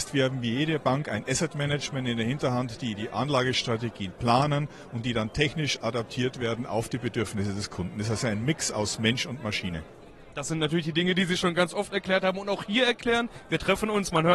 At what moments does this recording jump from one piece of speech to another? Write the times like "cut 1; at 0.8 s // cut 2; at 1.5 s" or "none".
none

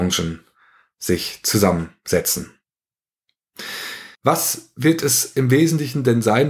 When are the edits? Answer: cut 1; at 4.2 s

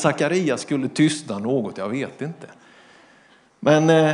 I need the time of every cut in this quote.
none

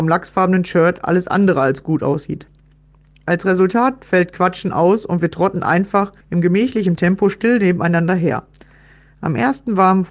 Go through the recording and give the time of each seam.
cut 1; at 6.2 s

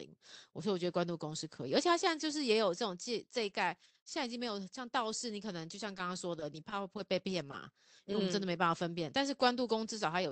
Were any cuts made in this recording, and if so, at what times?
none

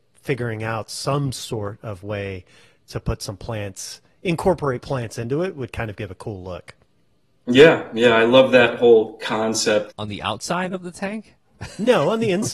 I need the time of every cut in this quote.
cut 1; at 9.9 s

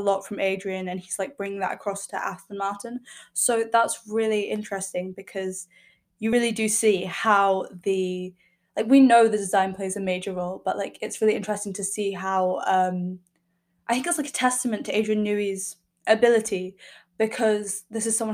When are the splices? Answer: none

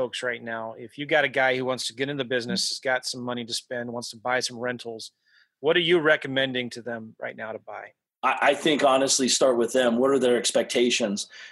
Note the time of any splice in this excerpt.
none

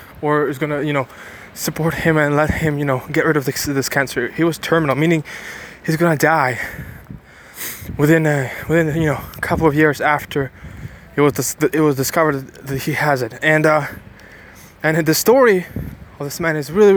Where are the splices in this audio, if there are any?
cut 1; at 11.0 s

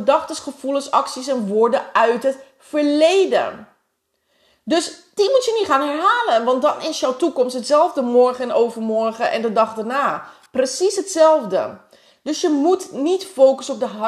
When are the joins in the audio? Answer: none

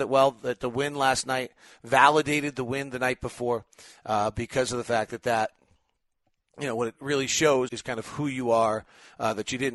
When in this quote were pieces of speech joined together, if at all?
cut 1; at 7.7 s

